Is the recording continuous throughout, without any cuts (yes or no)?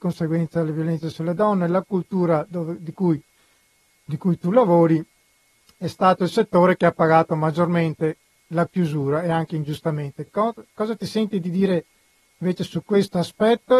yes